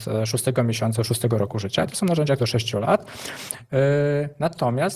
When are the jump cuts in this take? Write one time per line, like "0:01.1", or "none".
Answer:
0:01.0
0:02.4